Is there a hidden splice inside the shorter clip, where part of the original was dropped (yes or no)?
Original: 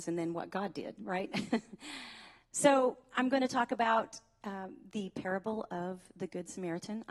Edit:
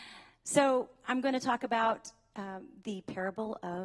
no